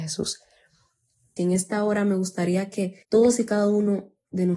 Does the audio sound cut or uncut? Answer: cut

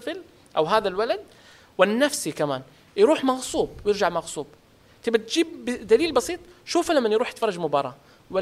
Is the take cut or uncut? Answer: uncut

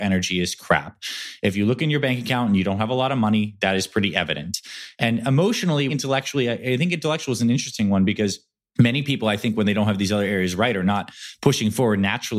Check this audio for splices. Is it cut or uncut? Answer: cut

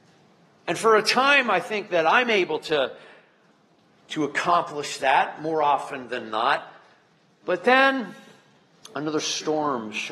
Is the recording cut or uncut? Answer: uncut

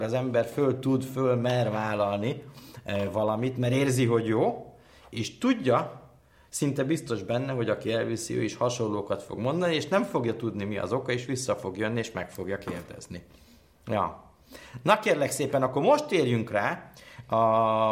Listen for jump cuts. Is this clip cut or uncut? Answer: uncut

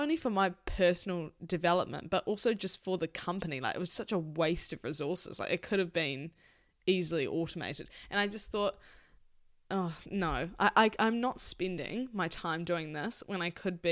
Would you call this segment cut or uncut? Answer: cut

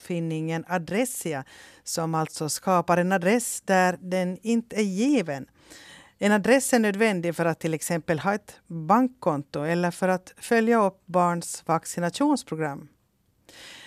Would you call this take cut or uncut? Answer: uncut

